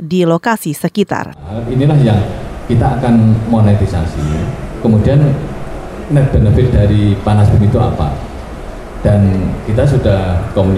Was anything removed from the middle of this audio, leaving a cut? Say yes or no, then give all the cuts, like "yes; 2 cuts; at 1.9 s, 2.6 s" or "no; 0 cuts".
no; 0 cuts